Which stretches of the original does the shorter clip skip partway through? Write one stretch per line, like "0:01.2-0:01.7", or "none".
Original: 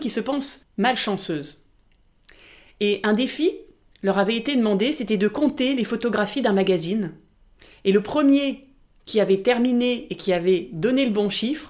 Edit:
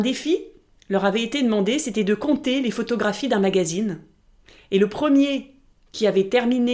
none